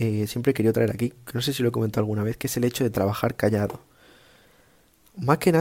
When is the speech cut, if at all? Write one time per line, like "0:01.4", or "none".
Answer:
none